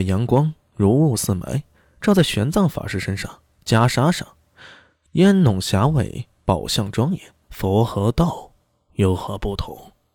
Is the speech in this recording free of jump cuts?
no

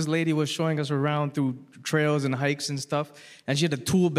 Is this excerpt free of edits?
yes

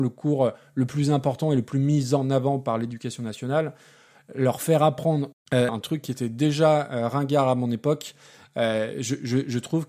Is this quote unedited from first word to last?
no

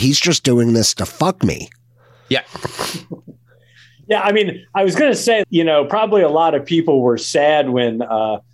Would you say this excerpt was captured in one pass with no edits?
no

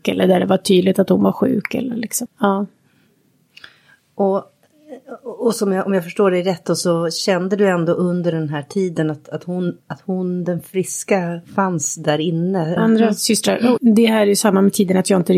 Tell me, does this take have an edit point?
yes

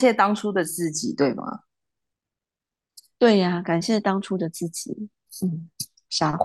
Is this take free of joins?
yes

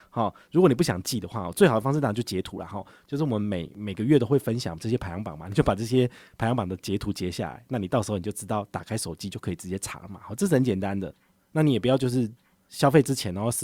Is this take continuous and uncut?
yes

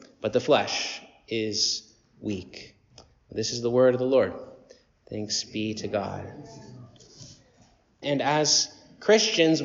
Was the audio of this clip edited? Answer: yes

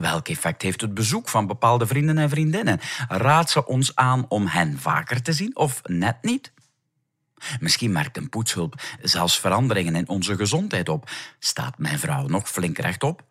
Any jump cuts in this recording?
no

